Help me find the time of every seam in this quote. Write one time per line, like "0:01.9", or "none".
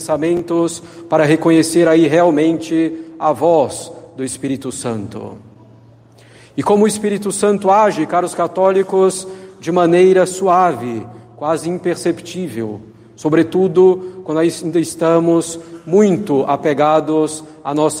none